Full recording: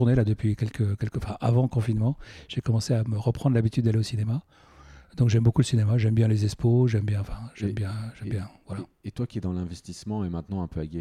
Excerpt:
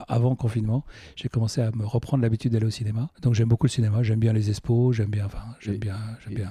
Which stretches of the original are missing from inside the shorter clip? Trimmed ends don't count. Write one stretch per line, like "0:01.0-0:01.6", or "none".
0:04.5-0:05.1